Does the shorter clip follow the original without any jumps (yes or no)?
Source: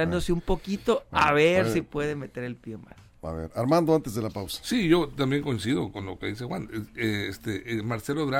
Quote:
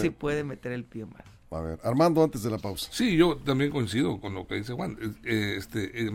yes